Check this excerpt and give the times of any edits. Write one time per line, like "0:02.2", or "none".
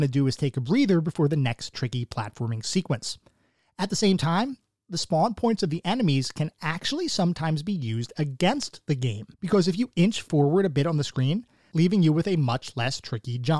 0:09.3
0:11.7